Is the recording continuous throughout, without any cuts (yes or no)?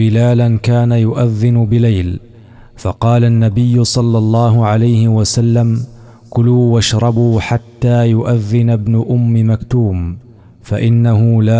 yes